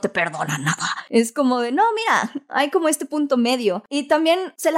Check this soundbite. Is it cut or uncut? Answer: uncut